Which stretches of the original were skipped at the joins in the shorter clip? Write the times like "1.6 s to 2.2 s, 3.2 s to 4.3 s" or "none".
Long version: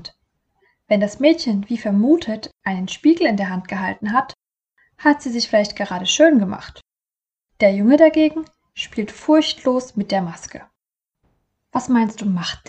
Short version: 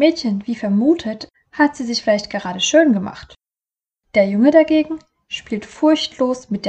2.6 s to 4.8 s